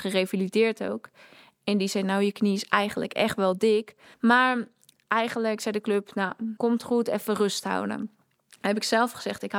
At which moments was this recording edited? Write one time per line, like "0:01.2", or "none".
0:04.1
0:06.6